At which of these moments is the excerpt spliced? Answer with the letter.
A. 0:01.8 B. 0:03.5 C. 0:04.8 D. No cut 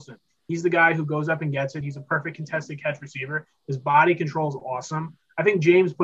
D